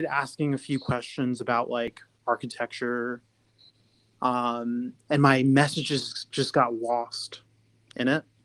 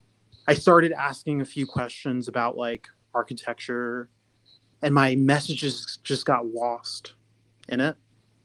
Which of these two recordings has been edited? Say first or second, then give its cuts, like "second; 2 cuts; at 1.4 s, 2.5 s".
second; 1 cut; at 4.7 s